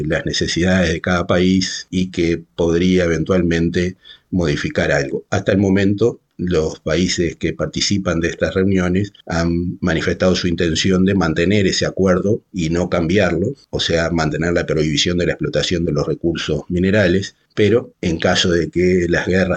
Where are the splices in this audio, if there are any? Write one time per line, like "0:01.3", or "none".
none